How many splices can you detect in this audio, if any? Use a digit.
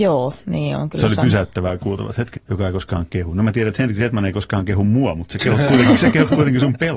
1